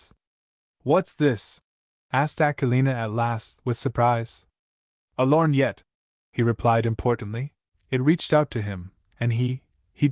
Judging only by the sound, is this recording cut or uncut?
cut